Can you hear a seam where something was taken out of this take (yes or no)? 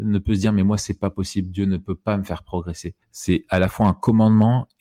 yes